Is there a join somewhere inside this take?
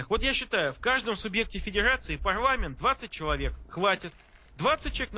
no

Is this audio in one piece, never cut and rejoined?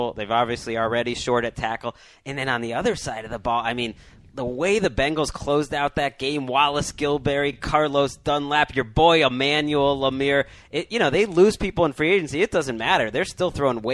yes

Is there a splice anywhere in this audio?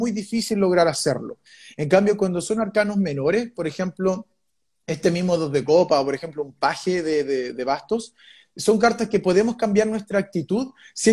no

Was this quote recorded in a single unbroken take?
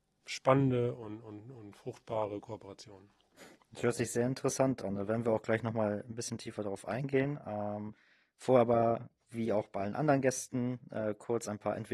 yes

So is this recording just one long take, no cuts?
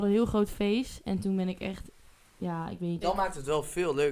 no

